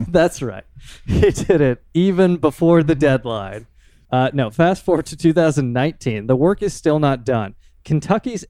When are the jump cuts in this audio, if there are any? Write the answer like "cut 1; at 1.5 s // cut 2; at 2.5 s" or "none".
cut 1; at 4.1 s